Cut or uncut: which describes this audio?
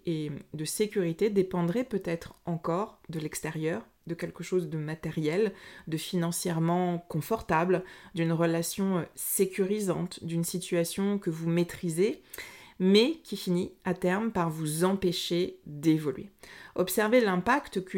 uncut